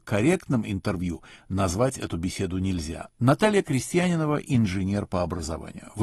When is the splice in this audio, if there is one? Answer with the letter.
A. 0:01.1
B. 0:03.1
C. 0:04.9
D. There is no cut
B